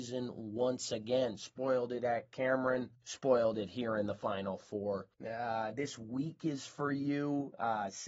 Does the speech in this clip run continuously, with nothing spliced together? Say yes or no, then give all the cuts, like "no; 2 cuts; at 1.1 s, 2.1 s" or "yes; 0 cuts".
no; 1 cut; at 5.2 s